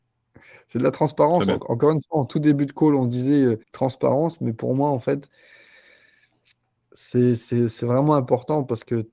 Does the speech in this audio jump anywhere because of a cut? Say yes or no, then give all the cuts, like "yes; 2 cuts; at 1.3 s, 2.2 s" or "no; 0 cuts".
yes; 1 cut; at 3.6 s